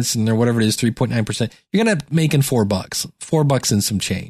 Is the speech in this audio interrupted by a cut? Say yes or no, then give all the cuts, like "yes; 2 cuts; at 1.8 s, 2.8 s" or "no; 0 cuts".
no; 0 cuts